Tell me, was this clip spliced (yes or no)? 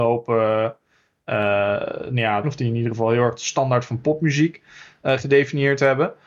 yes